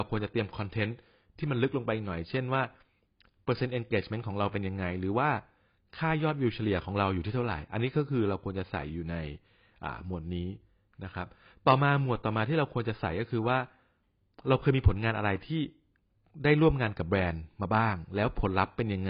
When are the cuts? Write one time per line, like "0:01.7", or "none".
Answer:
none